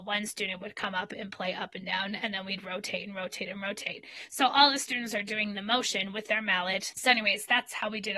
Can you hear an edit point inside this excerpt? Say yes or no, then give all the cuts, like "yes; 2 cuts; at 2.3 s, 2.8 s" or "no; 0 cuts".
yes; 1 cut; at 6.9 s